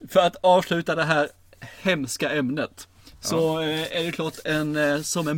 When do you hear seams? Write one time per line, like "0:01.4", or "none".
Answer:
none